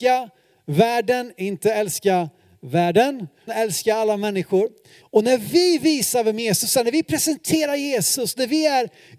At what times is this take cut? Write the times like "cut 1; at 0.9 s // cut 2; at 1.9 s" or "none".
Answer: cut 1; at 3.5 s // cut 2; at 5.0 s